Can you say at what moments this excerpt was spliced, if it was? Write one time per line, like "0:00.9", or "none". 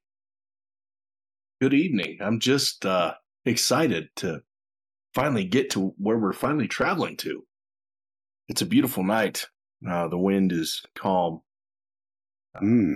none